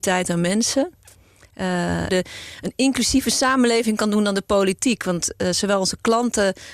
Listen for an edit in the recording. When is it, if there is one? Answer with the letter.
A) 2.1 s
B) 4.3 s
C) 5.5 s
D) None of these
A